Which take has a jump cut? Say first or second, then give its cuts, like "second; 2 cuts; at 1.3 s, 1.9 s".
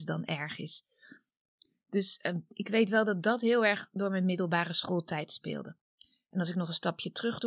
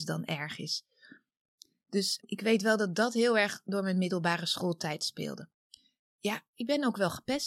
second; 2 cuts; at 2.2 s, 6.0 s